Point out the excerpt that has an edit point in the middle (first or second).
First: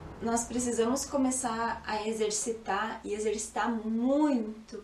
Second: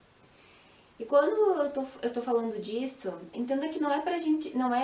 second